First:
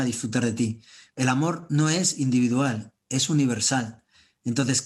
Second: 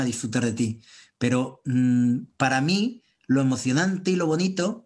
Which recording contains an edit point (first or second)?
first